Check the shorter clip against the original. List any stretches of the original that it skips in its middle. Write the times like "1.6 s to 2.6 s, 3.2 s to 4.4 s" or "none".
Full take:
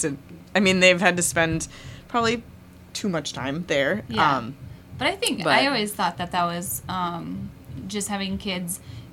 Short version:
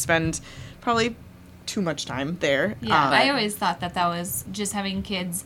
4.4 s to 5.5 s, 6.8 s to 7.8 s